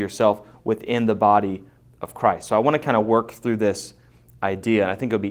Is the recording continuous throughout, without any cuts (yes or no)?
yes